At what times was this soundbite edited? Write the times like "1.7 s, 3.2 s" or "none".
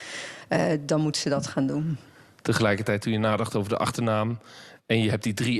none